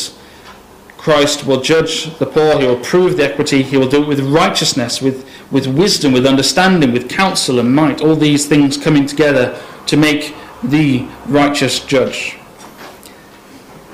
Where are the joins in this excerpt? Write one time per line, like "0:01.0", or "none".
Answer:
none